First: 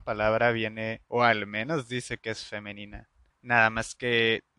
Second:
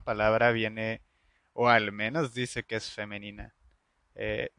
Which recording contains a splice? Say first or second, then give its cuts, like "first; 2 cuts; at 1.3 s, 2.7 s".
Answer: first; 2 cuts; at 1.0 s, 3.3 s